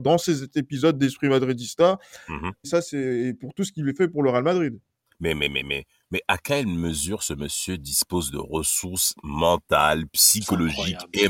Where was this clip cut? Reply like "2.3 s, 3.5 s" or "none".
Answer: 2.6 s

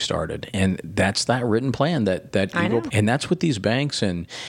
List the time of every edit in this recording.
2.9 s

